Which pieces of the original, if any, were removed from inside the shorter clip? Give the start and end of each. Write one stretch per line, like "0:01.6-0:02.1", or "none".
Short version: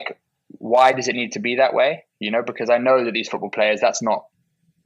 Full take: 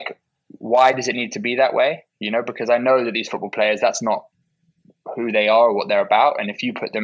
none